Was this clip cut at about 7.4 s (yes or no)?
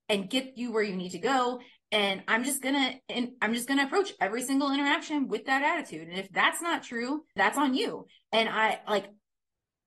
yes